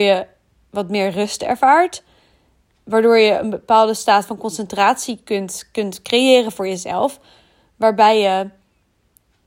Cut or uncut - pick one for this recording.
cut